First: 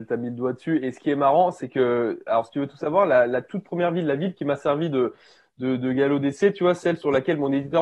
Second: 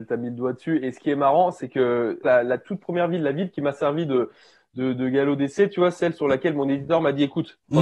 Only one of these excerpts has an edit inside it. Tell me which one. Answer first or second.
second